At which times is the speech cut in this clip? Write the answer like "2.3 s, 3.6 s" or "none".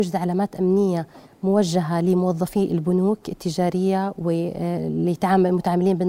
none